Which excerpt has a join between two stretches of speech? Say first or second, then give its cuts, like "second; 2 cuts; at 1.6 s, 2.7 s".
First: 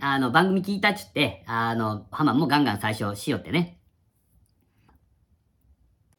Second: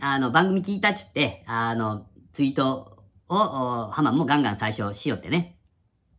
first; 2 cuts; at 2.1 s, 4.9 s